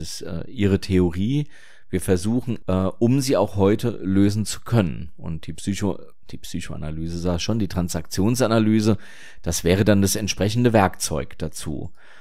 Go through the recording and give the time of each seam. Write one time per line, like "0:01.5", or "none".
0:02.6